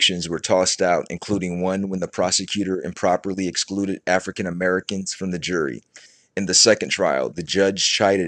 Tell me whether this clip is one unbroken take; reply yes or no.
yes